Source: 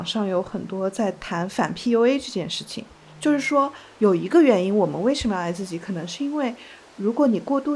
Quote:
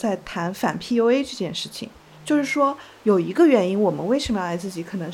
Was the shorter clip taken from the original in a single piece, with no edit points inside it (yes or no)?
yes